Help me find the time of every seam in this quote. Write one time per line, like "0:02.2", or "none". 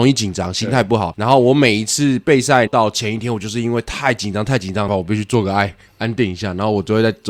0:02.7
0:04.9